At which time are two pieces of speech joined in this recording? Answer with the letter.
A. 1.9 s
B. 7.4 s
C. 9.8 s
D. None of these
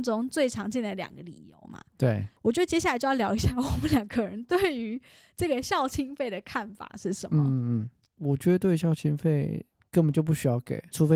D